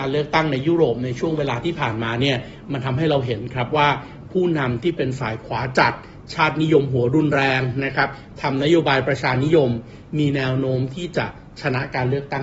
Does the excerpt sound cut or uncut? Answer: uncut